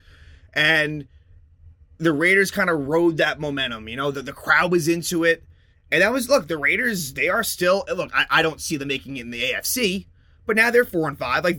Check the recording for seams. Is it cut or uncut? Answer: uncut